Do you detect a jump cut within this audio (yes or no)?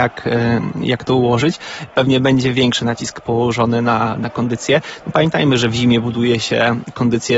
no